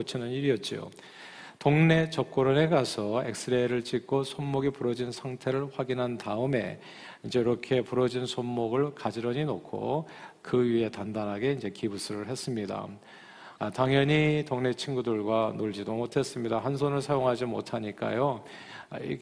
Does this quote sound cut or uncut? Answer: cut